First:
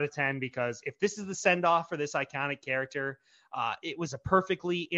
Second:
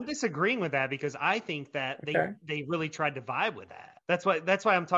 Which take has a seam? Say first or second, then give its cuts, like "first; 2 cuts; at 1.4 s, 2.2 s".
second; 1 cut; at 4.0 s